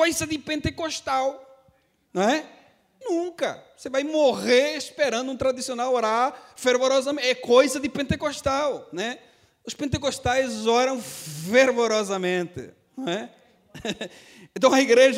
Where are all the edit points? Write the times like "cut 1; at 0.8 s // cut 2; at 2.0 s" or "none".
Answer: cut 1; at 3.0 s